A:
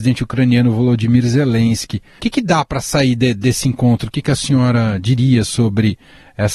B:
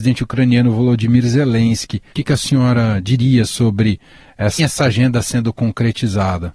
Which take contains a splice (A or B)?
B